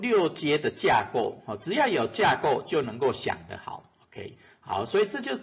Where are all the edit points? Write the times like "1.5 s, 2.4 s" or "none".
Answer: none